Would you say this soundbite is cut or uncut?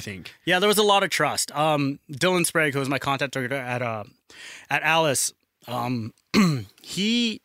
uncut